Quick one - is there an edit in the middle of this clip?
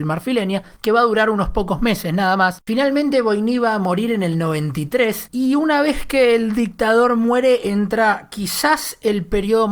yes; 1 cut; at 2.6 s

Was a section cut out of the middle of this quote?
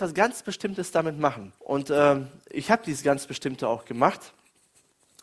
yes; 1 cut; at 1.6 s

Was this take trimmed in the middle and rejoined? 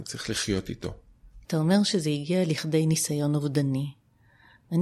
yes; 1 cut; at 1.4 s

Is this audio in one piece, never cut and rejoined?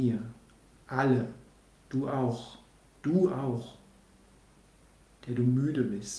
yes; 0 cuts

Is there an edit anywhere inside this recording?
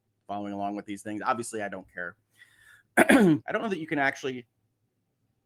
yes; 1 cut; at 3.4 s

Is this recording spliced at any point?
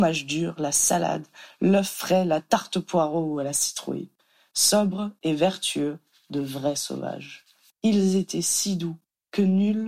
yes; 1 cut; at 7.7 s

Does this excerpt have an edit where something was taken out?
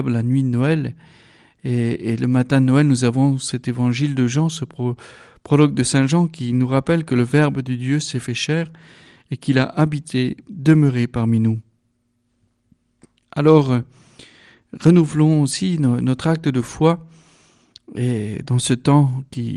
no; 0 cuts

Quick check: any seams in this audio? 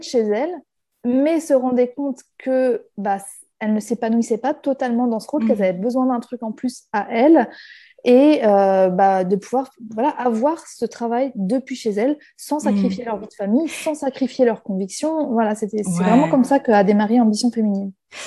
no; 0 cuts

